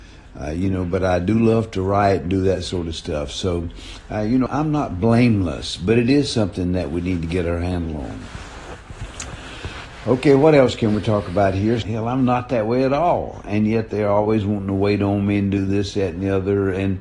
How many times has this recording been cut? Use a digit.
2